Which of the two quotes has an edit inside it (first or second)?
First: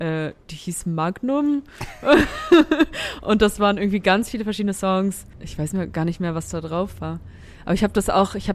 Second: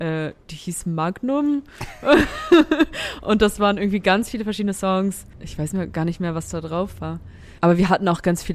second